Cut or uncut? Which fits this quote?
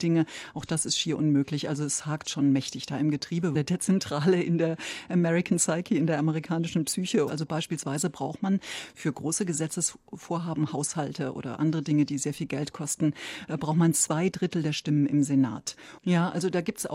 cut